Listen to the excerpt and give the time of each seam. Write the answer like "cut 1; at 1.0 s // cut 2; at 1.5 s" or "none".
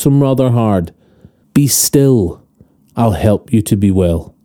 cut 1; at 1.4 s // cut 2; at 2.8 s